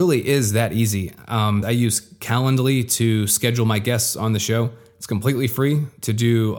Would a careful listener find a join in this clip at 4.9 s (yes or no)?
no